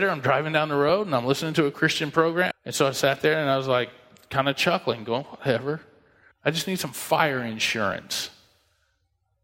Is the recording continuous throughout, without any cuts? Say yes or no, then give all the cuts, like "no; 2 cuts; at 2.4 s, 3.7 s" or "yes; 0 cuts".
no; 2 cuts; at 2.5 s, 6.3 s